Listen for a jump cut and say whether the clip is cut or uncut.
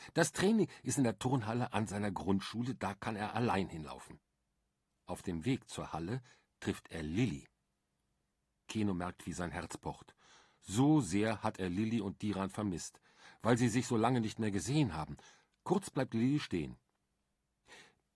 uncut